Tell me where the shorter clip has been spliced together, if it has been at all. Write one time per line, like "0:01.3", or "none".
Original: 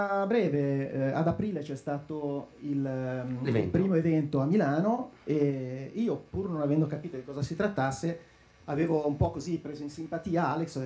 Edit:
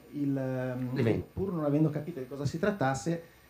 0:01.2